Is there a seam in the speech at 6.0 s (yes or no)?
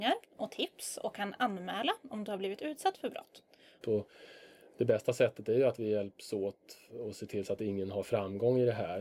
no